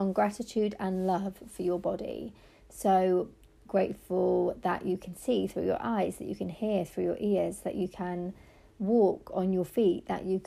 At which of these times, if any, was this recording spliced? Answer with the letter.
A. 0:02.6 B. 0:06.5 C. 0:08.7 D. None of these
D